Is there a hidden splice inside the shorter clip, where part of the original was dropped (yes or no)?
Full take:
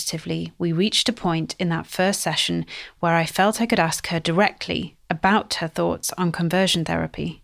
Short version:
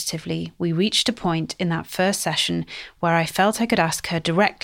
no